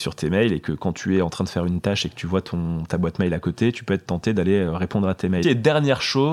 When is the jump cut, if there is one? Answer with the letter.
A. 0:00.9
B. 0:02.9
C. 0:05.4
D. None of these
C